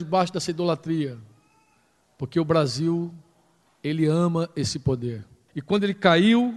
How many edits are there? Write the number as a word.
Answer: one